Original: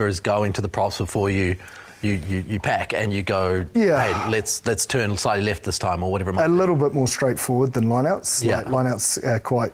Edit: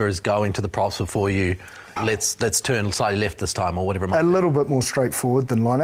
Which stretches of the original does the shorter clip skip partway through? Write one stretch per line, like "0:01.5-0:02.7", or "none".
0:02.0-0:04.2